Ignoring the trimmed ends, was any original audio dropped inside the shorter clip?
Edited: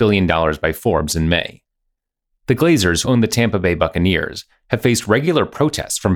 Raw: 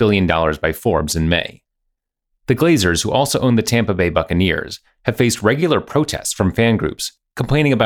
yes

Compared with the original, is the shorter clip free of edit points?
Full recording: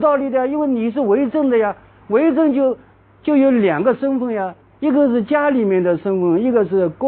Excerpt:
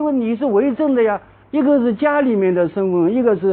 no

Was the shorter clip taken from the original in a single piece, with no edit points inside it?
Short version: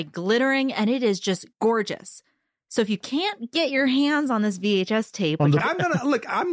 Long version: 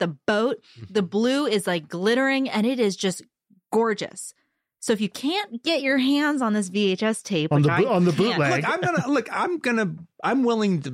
no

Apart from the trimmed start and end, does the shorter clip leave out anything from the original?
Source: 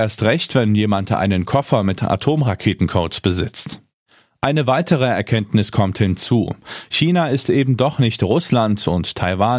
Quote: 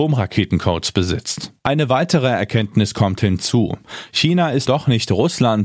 yes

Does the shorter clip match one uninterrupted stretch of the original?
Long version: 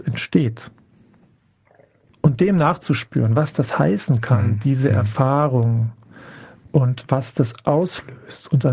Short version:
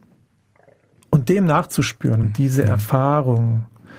no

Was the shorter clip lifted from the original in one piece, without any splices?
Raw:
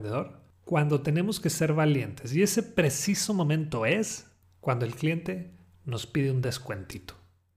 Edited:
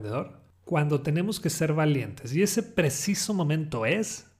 yes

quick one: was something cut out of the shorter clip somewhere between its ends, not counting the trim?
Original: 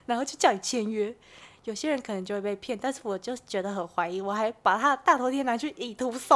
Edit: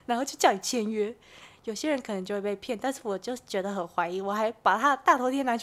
no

